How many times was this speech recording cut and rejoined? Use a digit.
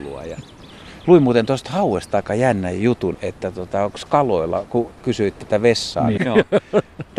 3